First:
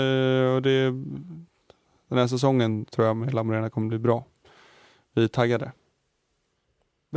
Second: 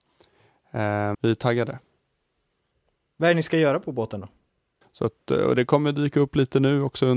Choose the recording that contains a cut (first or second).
second